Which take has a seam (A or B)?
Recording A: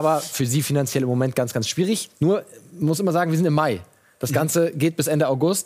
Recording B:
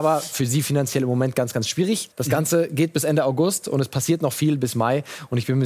B